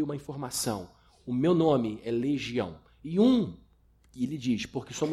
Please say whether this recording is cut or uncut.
uncut